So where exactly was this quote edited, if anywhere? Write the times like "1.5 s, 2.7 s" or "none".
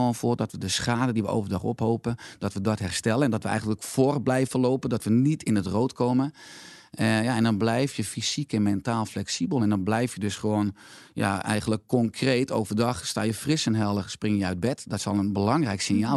none